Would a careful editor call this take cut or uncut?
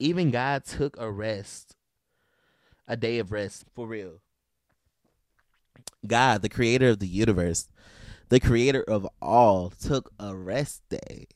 cut